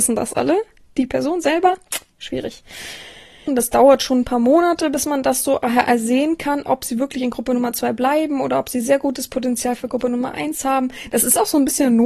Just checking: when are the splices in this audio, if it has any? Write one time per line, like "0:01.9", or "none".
0:03.5